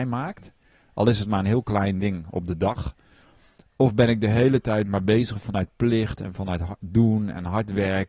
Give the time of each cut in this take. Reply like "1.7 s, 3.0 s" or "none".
none